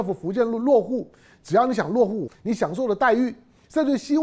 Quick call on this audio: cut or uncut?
cut